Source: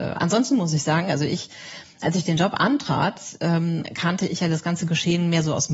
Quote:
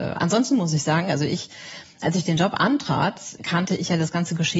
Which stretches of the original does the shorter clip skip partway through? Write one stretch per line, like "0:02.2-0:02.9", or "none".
0:03.4-0:03.9